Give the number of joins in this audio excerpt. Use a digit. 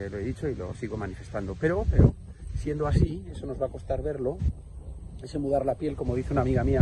0